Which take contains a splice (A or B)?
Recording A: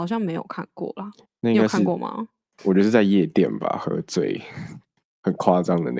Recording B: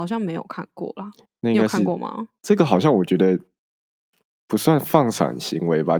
B